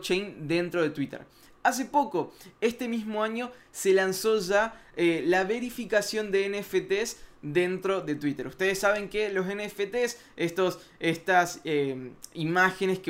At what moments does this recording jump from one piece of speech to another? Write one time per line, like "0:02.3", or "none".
none